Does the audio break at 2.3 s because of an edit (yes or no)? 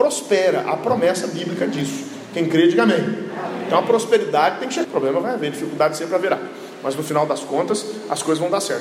no